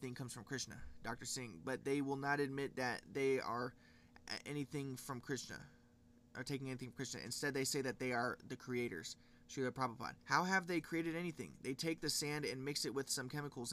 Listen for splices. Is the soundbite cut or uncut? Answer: cut